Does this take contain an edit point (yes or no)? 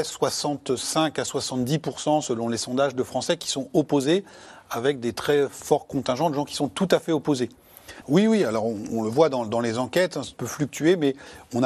yes